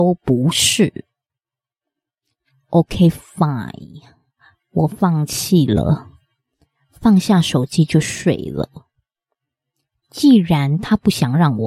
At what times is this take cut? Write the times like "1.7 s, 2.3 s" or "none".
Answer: 10.0 s